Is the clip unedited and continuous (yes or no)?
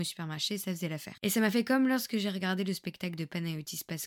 no